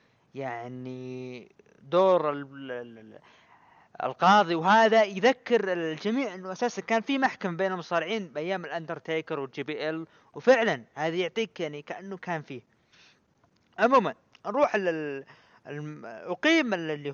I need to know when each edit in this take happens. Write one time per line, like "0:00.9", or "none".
none